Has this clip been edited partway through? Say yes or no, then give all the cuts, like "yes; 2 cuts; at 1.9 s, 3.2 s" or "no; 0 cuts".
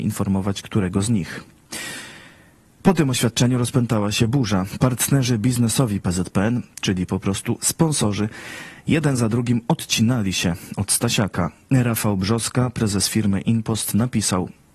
no; 0 cuts